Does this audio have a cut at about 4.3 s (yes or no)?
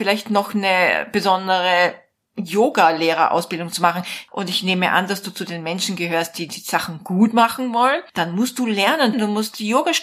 yes